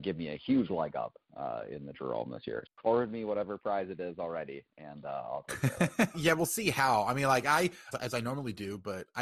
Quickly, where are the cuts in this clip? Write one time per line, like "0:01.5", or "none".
0:02.7
0:06.1
0:07.9